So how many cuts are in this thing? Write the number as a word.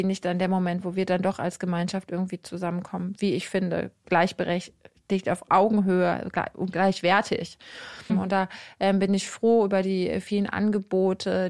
one